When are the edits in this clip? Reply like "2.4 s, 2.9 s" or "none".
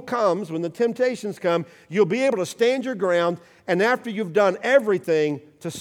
none